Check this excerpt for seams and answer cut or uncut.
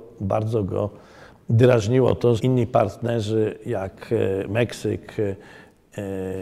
cut